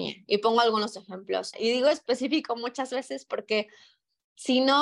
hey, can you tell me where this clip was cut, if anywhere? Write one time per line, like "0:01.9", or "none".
0:01.5